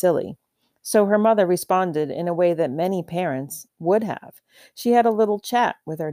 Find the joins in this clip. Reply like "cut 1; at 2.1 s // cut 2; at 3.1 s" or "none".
cut 1; at 3.7 s